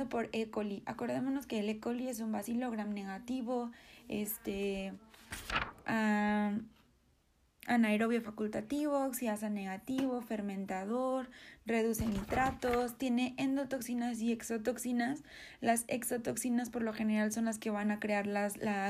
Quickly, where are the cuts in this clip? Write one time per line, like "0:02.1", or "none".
none